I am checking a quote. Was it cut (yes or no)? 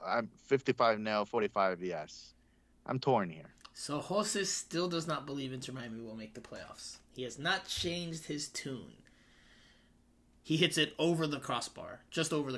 yes